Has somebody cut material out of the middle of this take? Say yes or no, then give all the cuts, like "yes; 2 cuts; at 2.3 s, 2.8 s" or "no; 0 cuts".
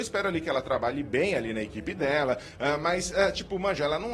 no; 0 cuts